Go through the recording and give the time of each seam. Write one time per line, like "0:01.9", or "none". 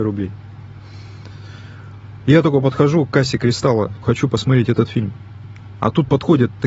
0:04.0